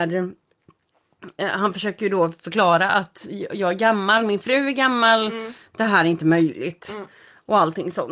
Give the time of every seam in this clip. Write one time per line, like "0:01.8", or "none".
none